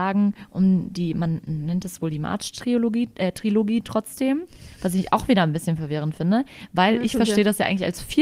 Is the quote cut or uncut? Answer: uncut